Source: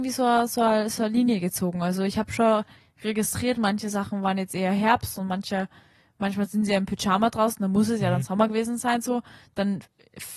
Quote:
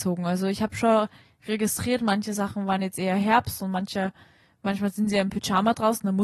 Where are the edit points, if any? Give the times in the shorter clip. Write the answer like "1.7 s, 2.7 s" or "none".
none